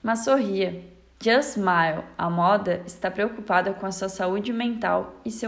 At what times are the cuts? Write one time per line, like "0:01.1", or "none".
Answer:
0:01.1